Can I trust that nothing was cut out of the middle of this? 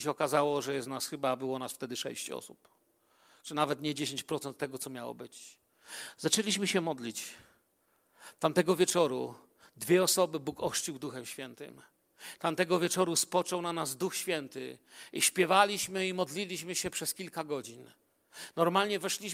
yes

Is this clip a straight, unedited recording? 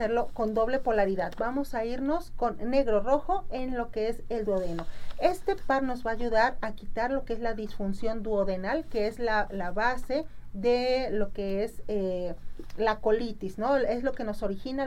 yes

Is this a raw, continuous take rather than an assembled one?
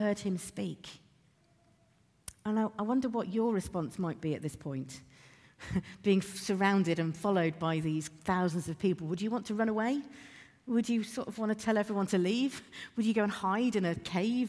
yes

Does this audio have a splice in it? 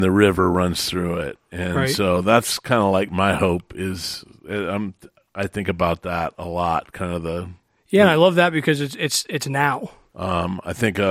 yes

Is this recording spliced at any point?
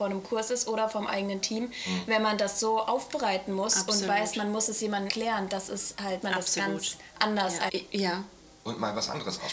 yes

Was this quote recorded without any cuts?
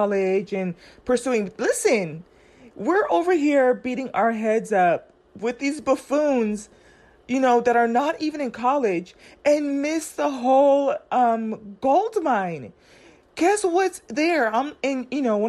yes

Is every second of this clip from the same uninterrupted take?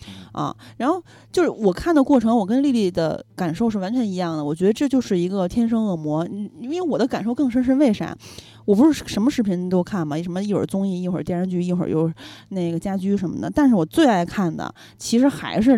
yes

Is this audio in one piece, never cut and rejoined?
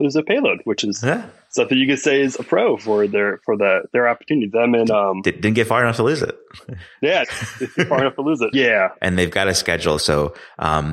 no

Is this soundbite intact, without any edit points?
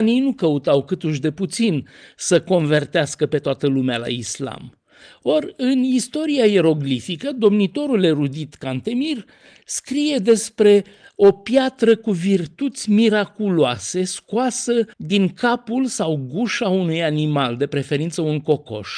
no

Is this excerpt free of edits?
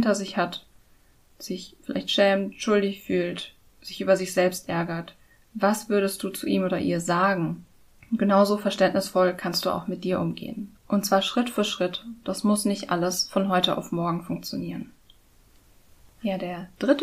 no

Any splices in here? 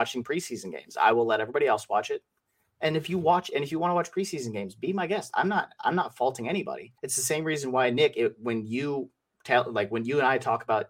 yes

